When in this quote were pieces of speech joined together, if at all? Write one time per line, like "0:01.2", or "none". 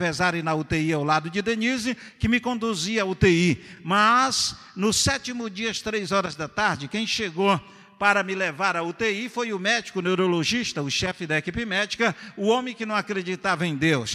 none